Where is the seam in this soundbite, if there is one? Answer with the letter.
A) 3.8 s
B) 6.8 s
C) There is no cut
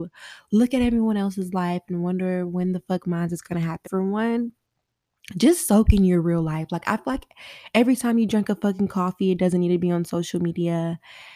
A